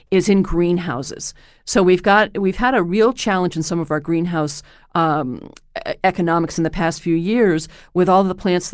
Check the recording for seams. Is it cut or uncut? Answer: uncut